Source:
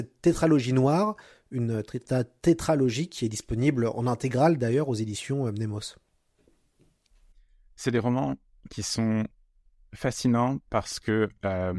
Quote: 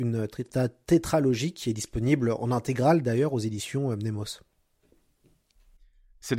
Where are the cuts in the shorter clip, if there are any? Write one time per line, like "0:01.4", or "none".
none